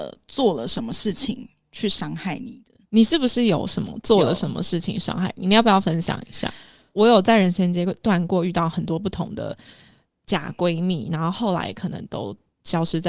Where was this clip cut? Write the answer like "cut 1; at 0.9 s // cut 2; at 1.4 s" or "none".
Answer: cut 1; at 2.9 s // cut 2; at 6.9 s